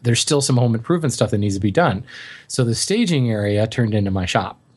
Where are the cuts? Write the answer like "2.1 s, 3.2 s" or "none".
none